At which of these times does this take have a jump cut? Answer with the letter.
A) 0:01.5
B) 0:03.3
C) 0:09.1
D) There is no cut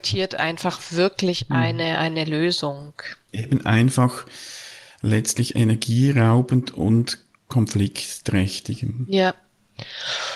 B